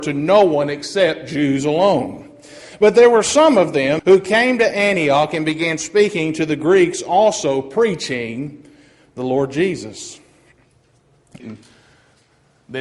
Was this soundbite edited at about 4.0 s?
yes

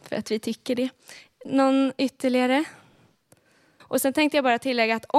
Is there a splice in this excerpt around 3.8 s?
yes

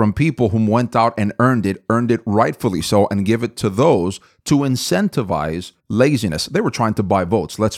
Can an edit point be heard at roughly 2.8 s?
no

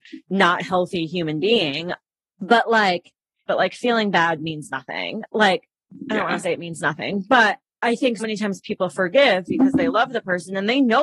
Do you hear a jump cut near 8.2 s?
yes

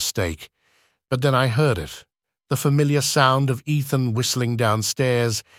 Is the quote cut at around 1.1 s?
no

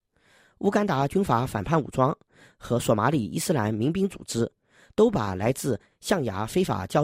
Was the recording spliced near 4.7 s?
no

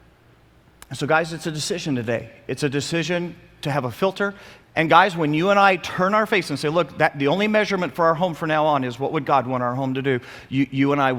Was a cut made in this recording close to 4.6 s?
yes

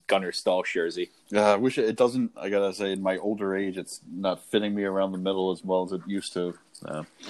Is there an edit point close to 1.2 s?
yes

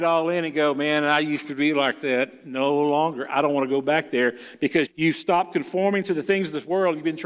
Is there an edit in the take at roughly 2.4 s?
no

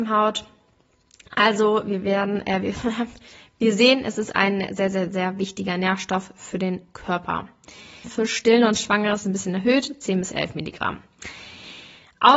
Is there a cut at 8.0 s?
yes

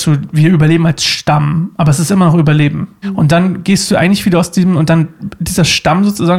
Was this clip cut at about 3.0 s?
yes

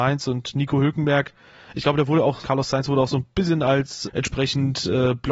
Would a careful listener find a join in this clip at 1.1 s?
no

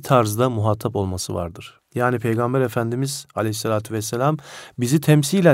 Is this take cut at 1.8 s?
yes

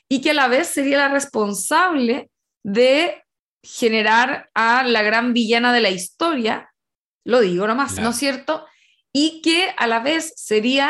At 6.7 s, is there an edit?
no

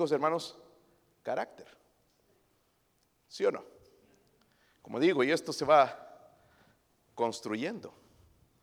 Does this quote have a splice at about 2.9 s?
no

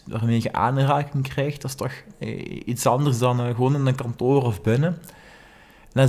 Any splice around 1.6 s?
no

